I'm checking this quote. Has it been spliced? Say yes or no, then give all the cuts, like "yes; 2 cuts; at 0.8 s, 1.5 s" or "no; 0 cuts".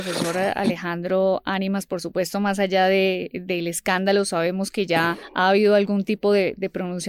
no; 0 cuts